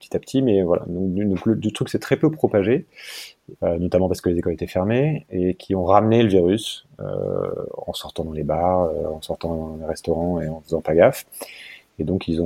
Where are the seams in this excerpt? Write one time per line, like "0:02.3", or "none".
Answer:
0:03.6

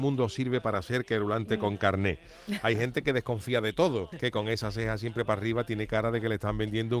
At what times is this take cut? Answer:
0:04.1

